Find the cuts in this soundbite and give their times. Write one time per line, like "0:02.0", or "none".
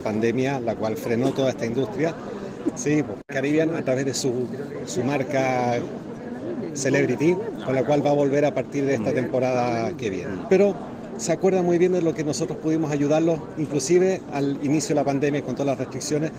0:02.8
0:10.5